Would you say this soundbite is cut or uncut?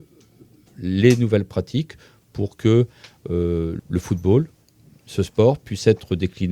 cut